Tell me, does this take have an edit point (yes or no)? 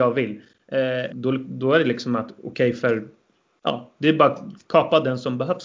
yes